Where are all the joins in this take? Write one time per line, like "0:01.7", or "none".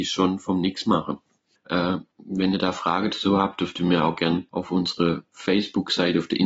0:01.6
0:04.5